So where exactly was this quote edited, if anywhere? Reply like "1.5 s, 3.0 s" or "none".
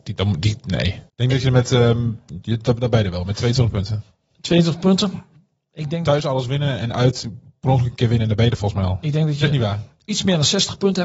1.1 s, 9.4 s

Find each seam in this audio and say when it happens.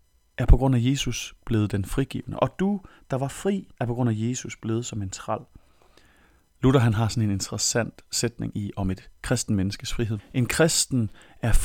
3.8 s, 10.2 s

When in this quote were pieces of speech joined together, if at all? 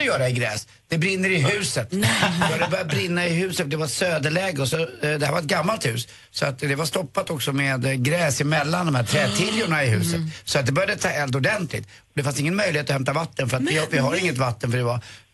none

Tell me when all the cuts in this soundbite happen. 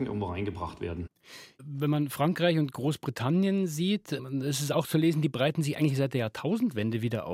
none

